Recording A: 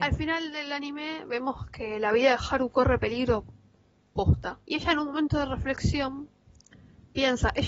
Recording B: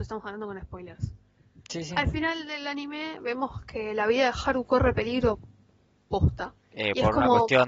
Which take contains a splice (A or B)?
B